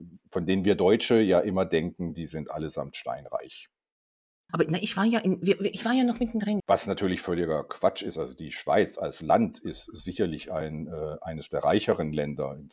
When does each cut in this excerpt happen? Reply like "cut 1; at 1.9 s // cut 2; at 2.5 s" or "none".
cut 1; at 4.5 s // cut 2; at 6.6 s